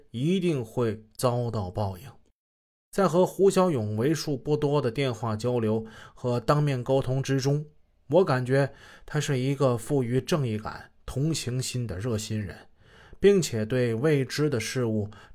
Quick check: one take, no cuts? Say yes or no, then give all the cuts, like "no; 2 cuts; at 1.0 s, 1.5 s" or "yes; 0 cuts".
yes; 0 cuts